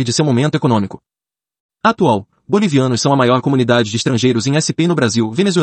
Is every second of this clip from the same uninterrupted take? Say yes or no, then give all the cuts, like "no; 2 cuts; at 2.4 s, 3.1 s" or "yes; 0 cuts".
yes; 0 cuts